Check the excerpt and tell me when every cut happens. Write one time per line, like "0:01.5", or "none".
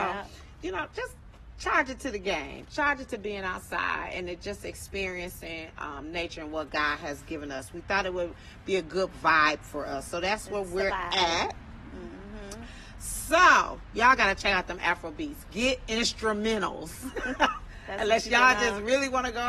none